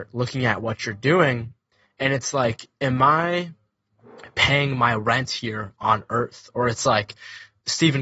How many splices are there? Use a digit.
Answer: 0